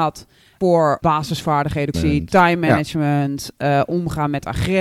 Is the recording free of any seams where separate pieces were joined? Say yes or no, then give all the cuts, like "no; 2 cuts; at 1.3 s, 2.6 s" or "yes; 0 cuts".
no; 1 cut; at 1.9 s